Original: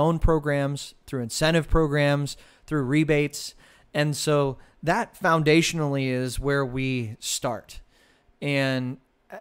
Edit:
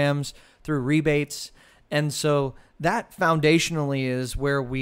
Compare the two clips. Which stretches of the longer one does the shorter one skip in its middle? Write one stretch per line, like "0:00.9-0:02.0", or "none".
none